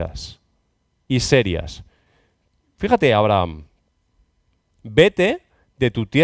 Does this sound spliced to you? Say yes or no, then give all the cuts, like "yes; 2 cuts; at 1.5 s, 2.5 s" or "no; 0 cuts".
no; 0 cuts